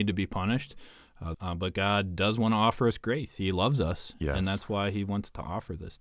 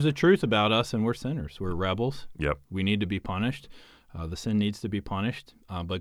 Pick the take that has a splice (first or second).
first